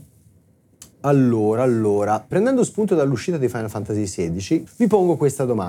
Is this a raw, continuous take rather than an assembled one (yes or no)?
no